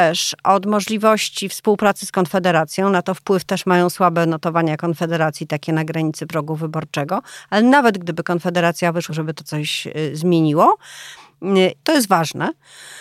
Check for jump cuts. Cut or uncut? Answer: cut